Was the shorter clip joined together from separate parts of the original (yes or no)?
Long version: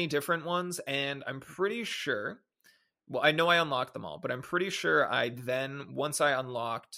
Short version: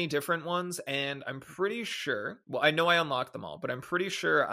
yes